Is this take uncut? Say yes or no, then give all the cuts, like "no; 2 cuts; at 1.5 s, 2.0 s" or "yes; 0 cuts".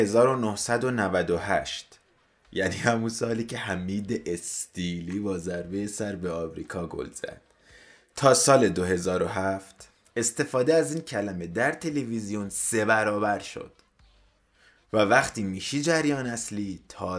yes; 0 cuts